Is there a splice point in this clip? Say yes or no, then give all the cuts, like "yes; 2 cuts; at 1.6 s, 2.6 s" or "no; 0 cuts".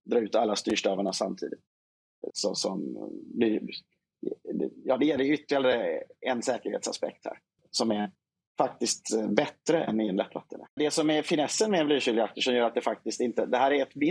yes; 2 cuts; at 2.3 s, 10.8 s